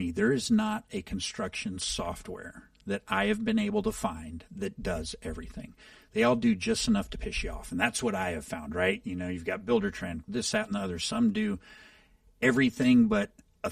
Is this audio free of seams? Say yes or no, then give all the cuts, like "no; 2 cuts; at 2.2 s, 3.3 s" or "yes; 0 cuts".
no; 1 cut; at 10.2 s